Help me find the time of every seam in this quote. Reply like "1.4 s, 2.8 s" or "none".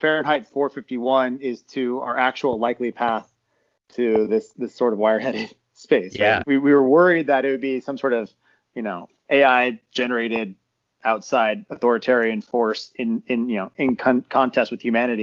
6.4 s